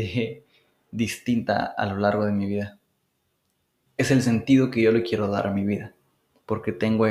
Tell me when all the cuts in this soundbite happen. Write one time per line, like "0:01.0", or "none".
0:03.9